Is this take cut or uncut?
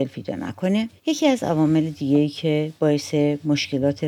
cut